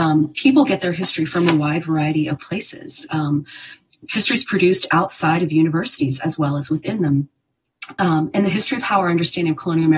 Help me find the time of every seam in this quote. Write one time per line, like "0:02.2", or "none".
none